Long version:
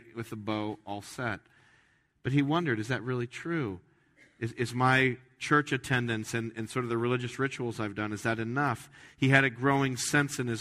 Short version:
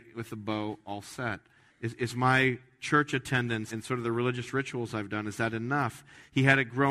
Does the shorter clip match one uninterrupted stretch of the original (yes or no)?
no